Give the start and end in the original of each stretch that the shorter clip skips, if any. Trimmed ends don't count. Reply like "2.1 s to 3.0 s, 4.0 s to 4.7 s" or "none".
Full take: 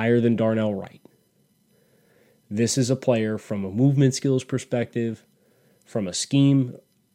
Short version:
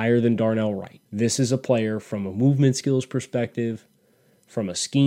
1.0 s to 2.4 s